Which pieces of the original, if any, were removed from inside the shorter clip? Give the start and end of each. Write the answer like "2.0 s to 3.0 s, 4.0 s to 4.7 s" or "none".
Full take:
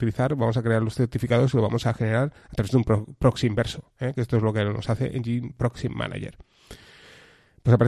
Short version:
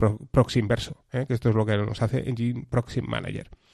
none